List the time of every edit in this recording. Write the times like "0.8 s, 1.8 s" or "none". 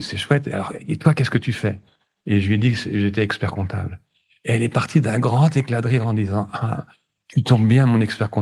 none